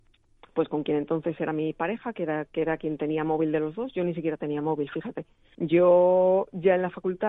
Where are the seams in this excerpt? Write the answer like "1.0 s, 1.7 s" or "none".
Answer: 5.5 s